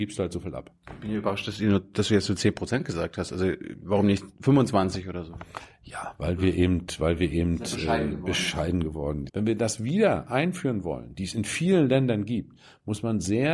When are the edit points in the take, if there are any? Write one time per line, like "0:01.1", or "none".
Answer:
0:09.3